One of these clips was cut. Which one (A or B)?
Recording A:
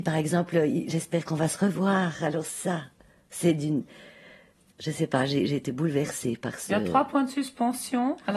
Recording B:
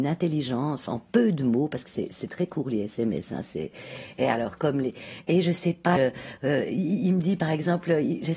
B